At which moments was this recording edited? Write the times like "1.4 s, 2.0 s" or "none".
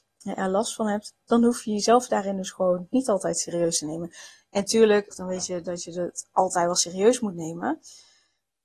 5.1 s